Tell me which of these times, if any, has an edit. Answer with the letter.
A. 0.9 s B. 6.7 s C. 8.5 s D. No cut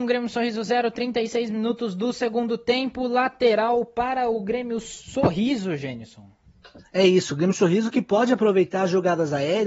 D